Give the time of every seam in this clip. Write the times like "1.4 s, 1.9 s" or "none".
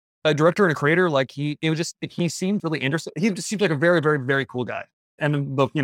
2.6 s